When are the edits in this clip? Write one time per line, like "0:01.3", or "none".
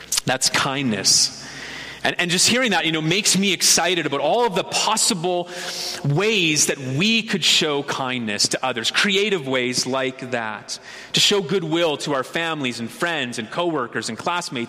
none

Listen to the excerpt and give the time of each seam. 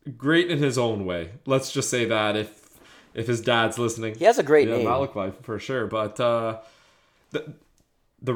none

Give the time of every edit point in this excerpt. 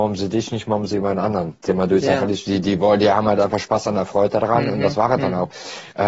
none

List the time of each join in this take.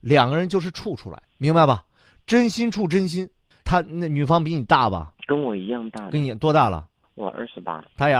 none

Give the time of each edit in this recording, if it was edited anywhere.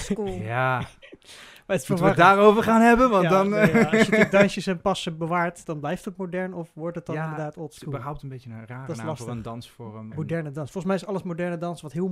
0:05.6
0:10.1

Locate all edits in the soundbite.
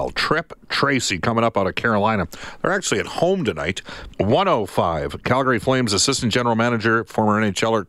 0:04.1

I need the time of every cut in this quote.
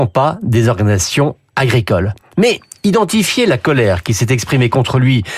none

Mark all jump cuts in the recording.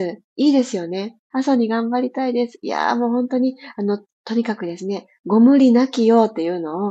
0:01.3

